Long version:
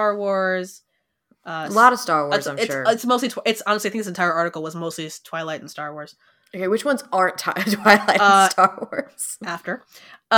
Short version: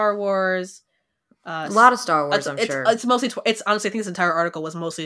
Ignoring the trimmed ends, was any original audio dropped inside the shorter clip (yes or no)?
no